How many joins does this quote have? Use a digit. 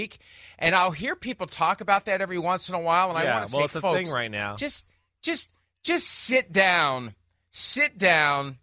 0